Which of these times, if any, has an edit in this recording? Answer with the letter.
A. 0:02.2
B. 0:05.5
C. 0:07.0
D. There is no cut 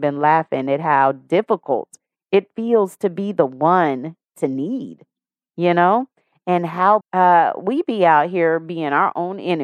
C